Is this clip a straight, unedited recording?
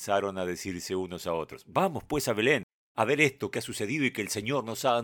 yes; 0 cuts

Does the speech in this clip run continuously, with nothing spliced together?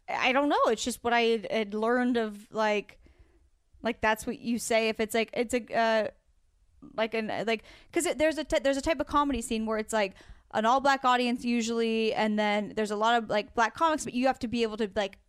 no; 1 cut; at 14.0 s

